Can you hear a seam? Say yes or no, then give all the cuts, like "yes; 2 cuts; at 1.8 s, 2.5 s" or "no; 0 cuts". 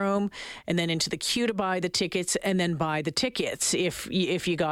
no; 0 cuts